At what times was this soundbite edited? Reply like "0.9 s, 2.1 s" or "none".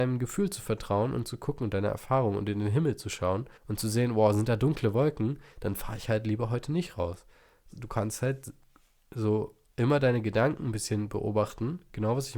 3.6 s, 7.7 s